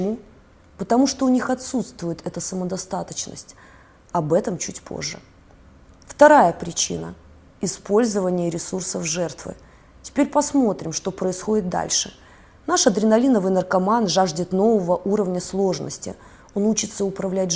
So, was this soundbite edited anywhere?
no; 0 cuts

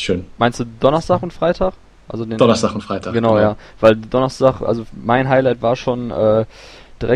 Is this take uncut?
yes; 0 cuts

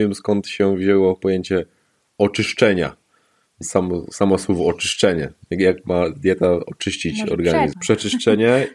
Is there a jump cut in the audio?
yes; 2 cuts; at 3.6 s, 7.7 s

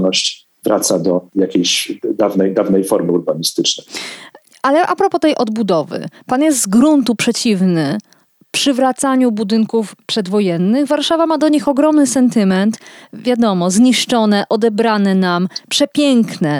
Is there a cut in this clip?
no; 0 cuts

